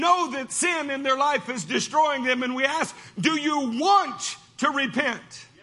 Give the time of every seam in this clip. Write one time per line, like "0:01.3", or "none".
none